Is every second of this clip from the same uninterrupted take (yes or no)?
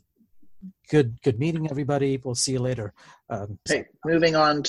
no